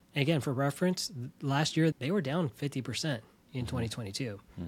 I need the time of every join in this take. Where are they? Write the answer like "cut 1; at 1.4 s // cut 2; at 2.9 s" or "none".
cut 1; at 1.9 s